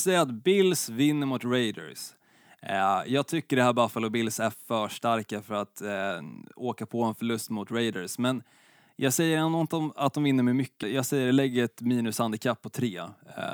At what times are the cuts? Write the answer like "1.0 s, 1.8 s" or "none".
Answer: 10.8 s